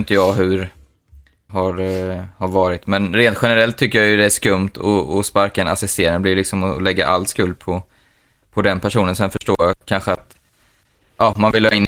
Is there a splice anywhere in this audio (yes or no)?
yes